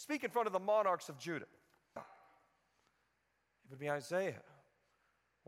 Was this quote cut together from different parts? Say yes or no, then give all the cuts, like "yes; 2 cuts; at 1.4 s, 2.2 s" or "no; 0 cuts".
yes; 1 cut; at 2.0 s